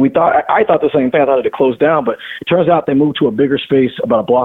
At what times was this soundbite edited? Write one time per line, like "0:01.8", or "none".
none

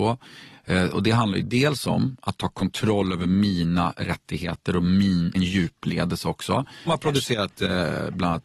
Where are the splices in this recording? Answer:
0:05.3
0:06.9

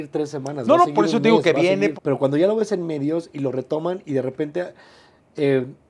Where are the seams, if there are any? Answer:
0:02.0

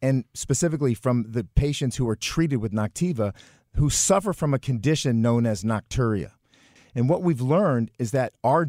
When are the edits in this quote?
0:06.8

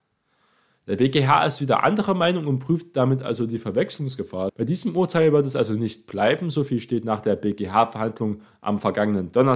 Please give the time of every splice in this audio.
0:04.5

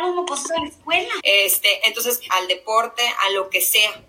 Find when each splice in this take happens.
0:01.2
0:02.3

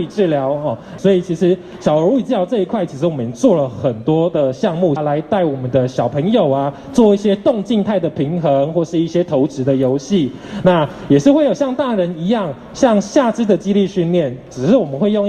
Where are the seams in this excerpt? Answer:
0:01.0
0:05.0

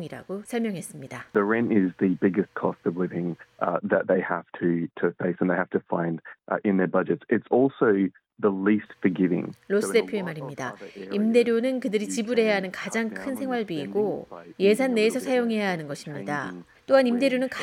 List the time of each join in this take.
none

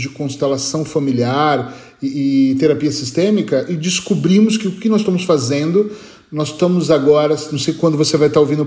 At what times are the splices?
none

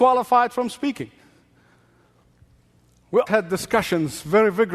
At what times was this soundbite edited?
0:03.3

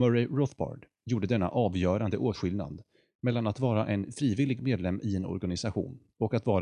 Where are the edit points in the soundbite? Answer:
none

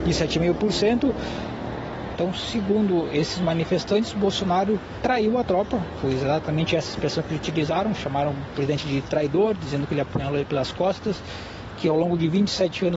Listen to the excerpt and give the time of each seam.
0:02.1

